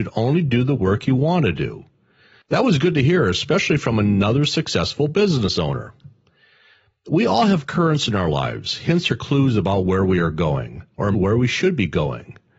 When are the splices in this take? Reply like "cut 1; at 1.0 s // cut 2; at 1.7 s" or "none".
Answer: cut 1; at 11.1 s